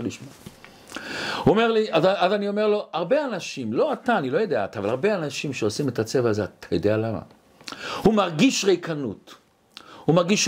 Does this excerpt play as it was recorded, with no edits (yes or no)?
yes